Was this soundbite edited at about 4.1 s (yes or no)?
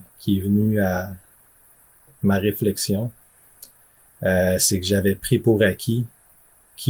no